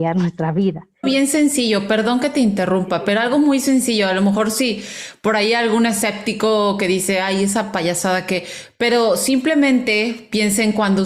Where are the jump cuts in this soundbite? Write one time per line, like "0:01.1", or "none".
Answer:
0:01.0